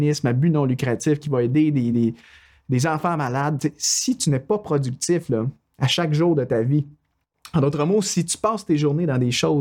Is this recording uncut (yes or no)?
yes